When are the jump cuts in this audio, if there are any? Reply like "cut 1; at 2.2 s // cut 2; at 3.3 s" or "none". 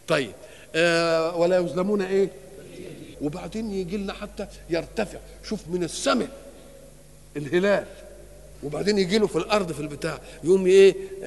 cut 1; at 3.1 s // cut 2; at 8.5 s